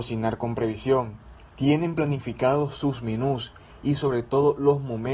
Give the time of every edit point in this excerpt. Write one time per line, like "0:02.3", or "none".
0:01.5